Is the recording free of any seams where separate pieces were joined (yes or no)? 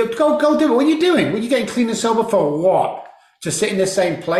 yes